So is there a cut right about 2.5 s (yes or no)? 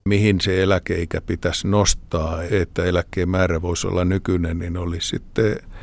yes